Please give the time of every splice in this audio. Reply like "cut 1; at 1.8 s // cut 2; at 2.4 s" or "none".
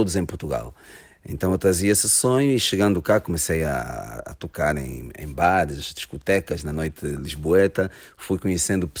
none